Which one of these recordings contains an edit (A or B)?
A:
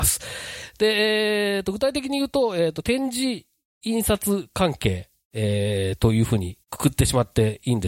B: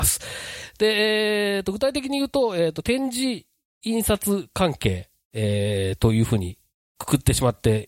A